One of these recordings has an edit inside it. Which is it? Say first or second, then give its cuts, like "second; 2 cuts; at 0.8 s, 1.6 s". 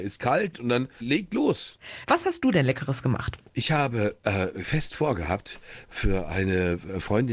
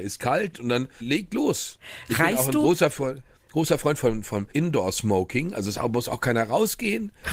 first; 1 cut; at 2.0 s